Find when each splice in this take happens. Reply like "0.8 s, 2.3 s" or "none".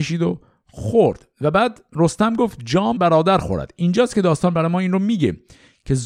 3.0 s